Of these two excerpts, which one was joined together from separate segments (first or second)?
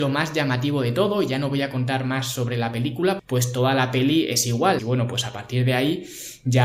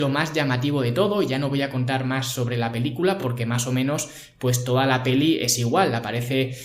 first